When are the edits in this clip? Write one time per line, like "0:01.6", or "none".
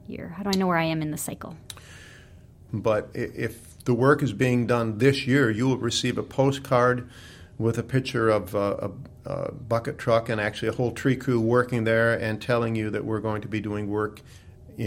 0:02.7